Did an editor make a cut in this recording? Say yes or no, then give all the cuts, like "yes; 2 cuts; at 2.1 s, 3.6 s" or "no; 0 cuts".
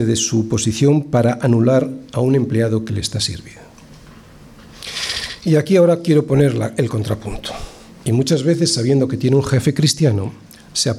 yes; 1 cut; at 8.0 s